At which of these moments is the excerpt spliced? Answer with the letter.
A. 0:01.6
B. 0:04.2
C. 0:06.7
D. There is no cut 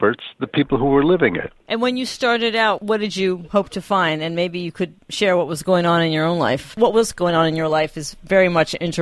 A